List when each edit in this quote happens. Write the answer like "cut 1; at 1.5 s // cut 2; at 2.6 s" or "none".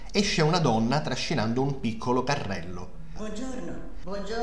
cut 1; at 3.2 s